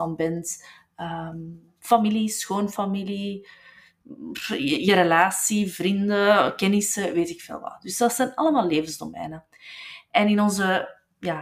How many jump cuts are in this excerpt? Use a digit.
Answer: 0